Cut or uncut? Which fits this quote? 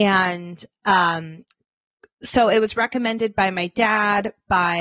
uncut